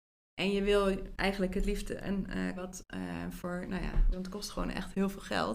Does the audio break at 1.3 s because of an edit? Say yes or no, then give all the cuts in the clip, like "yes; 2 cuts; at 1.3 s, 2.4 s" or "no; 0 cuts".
no; 2 cuts; at 2.6 s, 4.1 s